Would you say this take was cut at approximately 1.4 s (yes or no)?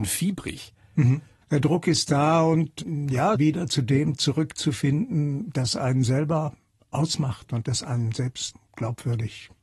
yes